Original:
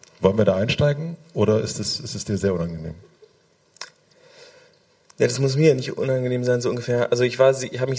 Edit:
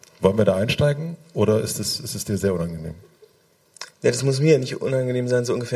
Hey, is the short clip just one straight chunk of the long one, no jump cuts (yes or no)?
no